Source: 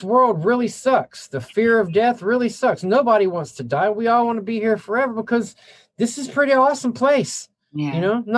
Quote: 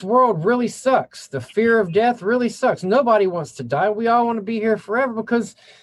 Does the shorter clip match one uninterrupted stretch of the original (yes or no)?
yes